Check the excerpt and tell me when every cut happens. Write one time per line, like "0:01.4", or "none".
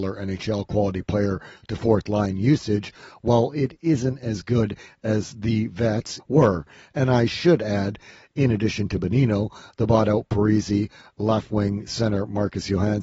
0:06.2

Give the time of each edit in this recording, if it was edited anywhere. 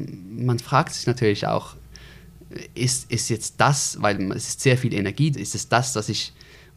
0:05.3

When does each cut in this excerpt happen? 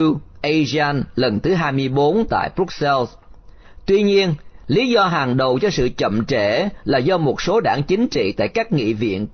none

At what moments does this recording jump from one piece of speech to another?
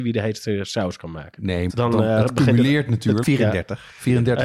0:01.7
0:03.2

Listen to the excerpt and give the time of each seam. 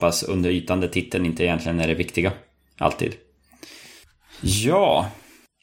none

